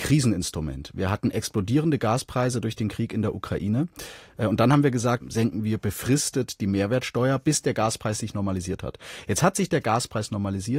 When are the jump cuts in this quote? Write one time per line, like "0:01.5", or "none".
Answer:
0:05.2